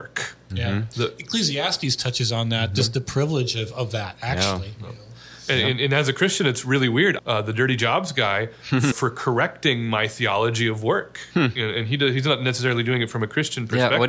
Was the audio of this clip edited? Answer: yes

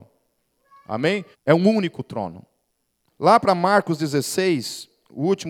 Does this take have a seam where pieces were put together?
yes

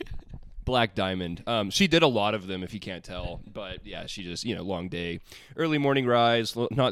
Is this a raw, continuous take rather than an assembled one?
yes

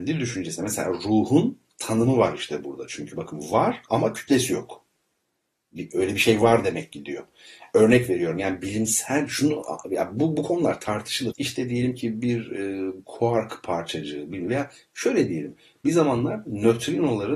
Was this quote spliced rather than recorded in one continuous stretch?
yes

